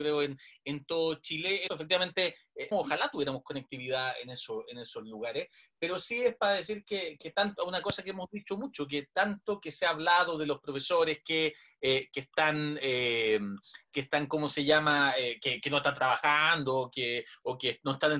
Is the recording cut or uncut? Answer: cut